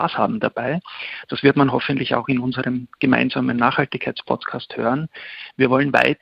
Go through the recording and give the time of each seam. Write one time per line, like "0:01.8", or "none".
none